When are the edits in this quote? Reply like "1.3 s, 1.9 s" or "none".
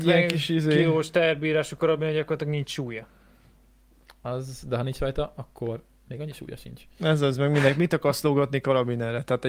none